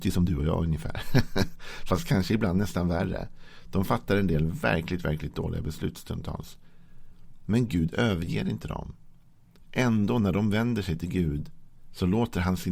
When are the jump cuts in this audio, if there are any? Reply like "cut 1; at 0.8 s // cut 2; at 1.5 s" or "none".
none